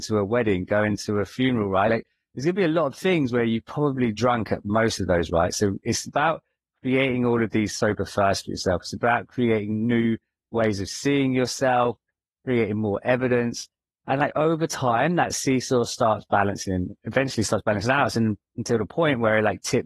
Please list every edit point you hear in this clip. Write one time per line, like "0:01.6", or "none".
none